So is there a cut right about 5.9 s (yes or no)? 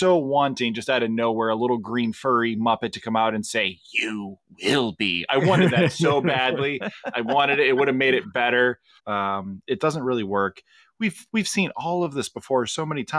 no